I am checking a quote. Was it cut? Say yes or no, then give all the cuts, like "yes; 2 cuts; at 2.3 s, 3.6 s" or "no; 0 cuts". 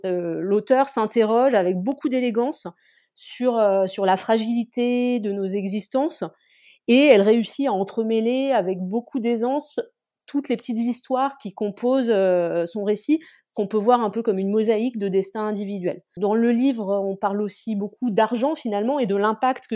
no; 0 cuts